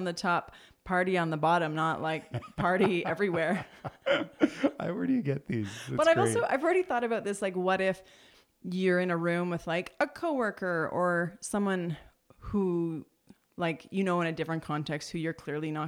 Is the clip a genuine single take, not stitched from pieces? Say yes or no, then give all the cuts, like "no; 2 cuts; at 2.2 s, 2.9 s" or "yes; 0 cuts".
yes; 0 cuts